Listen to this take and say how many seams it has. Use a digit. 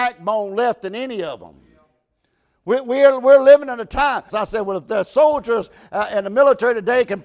1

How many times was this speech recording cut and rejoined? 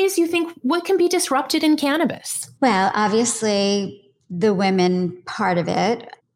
1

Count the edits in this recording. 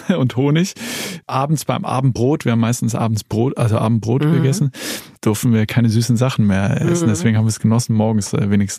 0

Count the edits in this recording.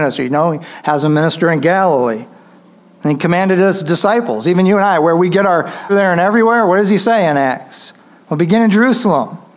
1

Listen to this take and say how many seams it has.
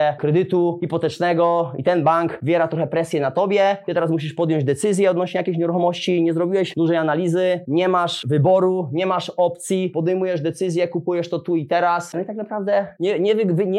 0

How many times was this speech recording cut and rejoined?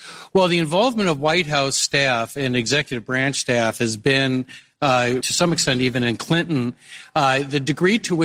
1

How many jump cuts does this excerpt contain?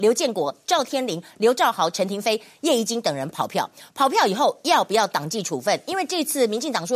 0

